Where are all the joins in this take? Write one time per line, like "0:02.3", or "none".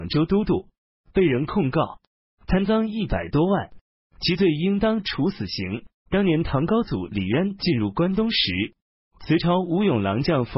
0:06.1